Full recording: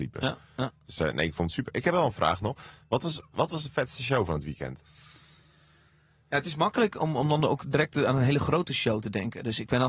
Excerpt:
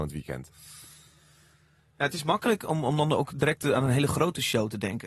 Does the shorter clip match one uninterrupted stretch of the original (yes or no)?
yes